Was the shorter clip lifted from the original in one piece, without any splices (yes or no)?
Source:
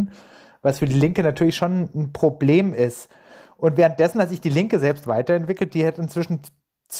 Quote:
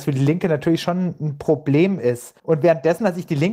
no